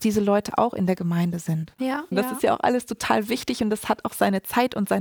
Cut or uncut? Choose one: cut